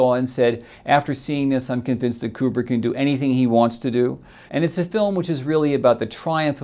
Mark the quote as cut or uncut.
cut